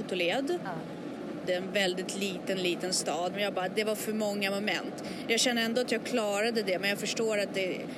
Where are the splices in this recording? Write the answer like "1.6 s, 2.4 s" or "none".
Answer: 1.5 s, 3.3 s

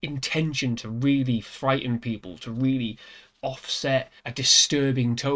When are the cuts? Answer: 4.2 s

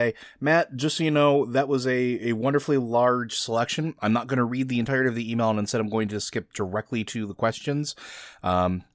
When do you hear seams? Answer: none

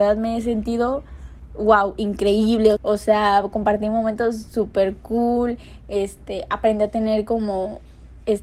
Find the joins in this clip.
2.8 s

